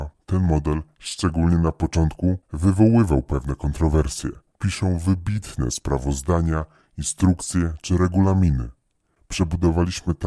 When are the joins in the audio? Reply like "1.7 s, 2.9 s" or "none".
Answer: 4.5 s, 9.1 s